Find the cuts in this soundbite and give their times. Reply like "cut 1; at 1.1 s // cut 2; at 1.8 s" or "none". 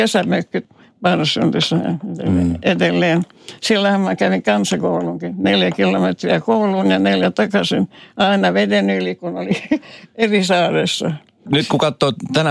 none

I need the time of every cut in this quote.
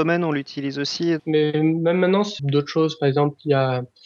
cut 1; at 1.2 s // cut 2; at 2.4 s

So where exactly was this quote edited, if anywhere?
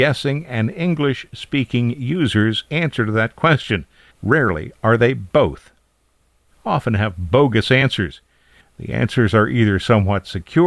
cut 1; at 4.1 s // cut 2; at 6.5 s // cut 3; at 8.6 s

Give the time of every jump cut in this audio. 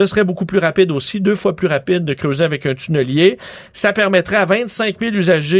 none

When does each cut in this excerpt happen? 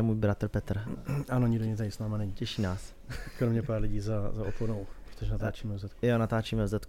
none

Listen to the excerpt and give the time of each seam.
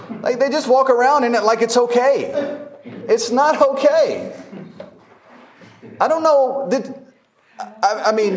none

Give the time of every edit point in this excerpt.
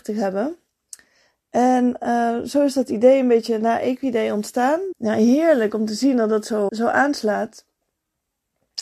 cut 1; at 4.9 s // cut 2; at 6.7 s

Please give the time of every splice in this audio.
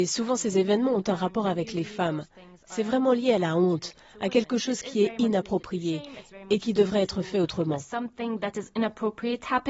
none

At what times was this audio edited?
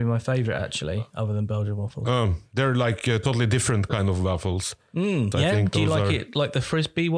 cut 1; at 5.3 s

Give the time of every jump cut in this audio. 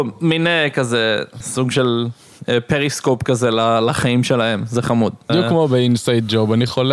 cut 1; at 1.4 s // cut 2; at 5.3 s

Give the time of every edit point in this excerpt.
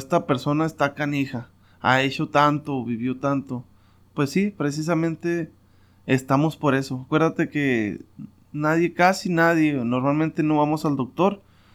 none

